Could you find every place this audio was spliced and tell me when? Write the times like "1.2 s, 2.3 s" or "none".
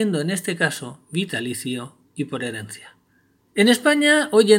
3.4 s

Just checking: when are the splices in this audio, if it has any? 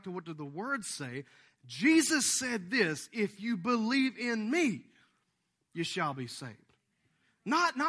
none

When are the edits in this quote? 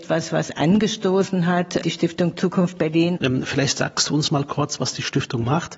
1.8 s, 3.2 s

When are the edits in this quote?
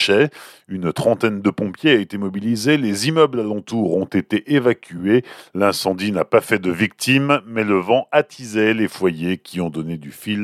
none

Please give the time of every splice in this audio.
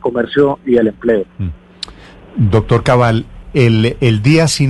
1.3 s

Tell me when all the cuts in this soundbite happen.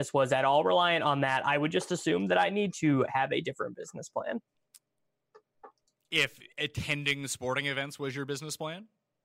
none

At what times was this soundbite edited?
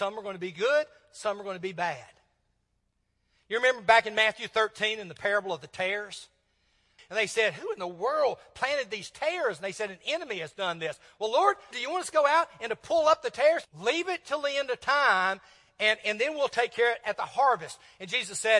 7.0 s, 11.7 s, 13.6 s

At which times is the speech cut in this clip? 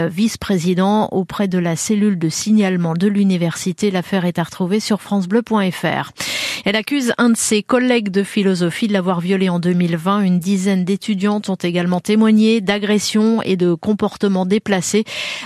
6.6 s

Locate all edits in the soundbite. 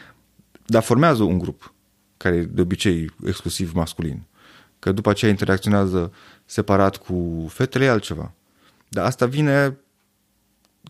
none

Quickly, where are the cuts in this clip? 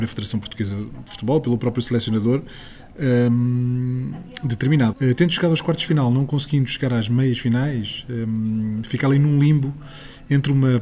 4.9 s

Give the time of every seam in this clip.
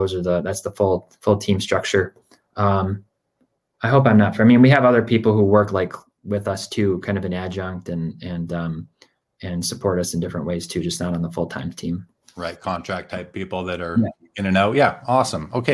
none

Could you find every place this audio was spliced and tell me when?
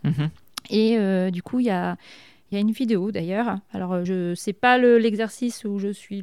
2.5 s, 4.0 s

